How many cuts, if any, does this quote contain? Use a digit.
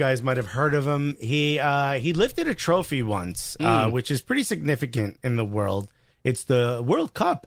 0